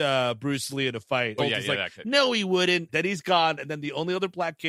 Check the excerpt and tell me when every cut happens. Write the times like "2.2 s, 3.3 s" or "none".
1.4 s, 2.9 s